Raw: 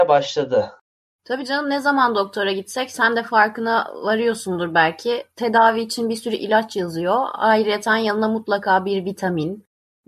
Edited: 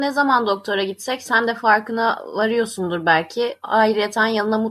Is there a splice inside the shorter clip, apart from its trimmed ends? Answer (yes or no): yes